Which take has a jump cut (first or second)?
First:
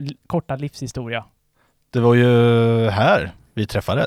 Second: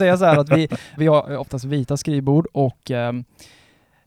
second